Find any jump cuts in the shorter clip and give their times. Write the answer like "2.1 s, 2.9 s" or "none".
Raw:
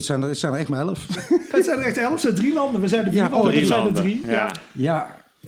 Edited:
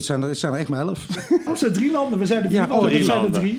1.5 s

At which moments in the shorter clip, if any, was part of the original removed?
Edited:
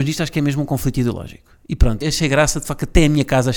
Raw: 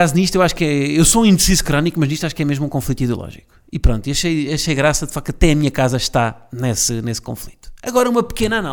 2.0 s

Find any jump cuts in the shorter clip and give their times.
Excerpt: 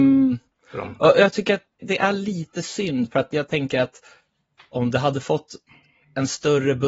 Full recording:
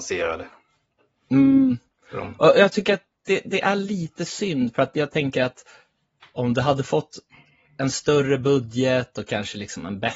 1.8 s

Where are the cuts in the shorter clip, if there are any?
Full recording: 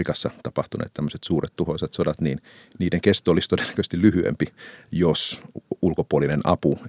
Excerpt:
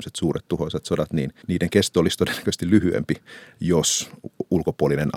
1.4 s

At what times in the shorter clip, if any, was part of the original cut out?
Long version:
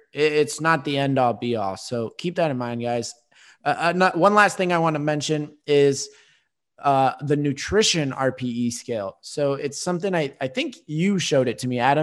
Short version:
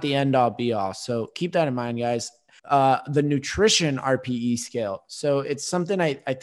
2.6 s

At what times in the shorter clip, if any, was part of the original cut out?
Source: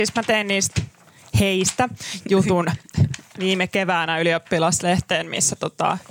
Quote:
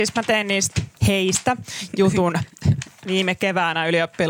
1.0 s

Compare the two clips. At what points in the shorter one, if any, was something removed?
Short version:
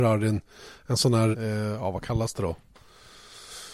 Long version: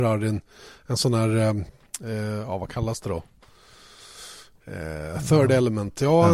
1.3 s

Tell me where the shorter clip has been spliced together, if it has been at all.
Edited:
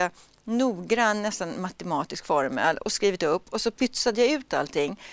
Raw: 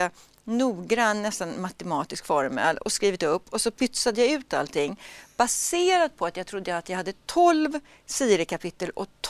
none

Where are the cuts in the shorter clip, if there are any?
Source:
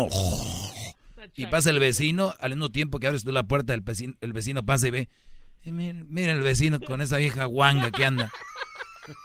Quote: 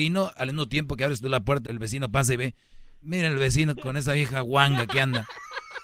1.6 s, 3.0 s

